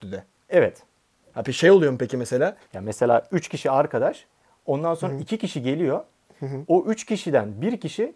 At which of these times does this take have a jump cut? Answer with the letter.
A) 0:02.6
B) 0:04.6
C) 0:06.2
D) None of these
A